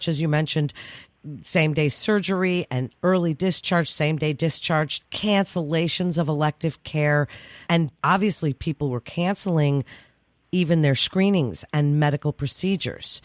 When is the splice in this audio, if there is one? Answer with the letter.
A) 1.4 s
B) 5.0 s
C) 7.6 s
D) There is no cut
B